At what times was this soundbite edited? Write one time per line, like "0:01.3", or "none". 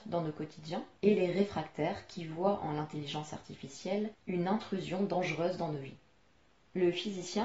0:01.0